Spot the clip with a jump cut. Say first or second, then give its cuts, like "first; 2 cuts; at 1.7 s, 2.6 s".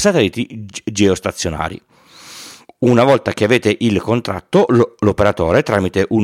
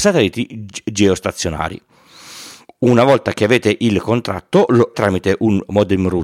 second; 1 cut; at 4.9 s